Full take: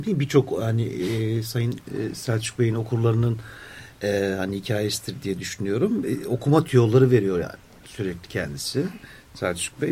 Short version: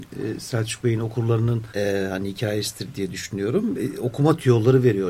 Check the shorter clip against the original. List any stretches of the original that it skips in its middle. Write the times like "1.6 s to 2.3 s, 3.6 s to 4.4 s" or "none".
3.4 s to 4.0 s

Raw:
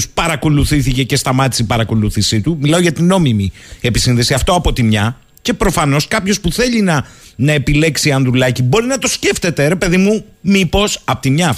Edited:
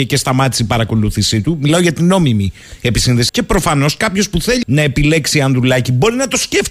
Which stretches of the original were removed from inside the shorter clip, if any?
4.3 s to 5.4 s, 6.7 s to 7.3 s

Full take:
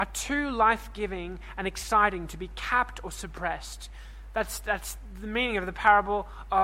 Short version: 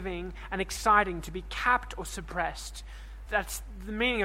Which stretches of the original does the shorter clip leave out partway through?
4.3 s to 4.6 s

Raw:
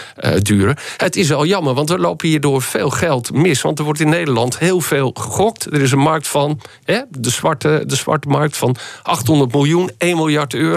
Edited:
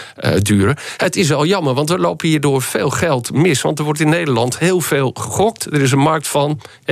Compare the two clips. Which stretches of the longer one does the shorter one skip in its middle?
none

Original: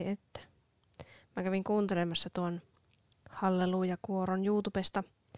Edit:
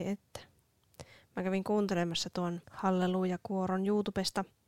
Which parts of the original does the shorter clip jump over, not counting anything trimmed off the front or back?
2.6 s to 3.2 s

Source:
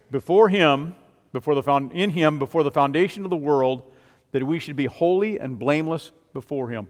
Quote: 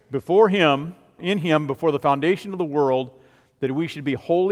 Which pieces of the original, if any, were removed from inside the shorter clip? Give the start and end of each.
1.2 s to 1.9 s

